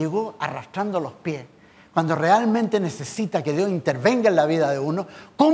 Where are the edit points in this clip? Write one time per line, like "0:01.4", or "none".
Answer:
none